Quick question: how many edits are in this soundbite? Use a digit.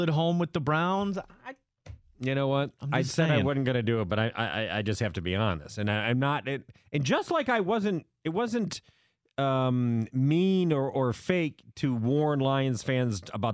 0